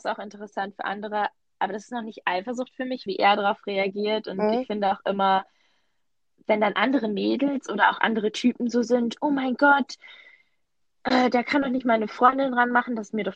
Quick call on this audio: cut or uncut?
cut